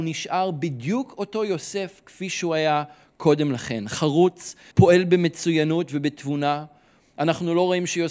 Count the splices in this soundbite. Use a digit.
1